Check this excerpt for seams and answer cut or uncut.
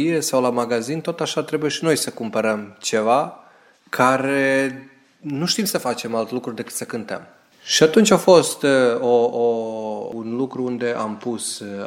uncut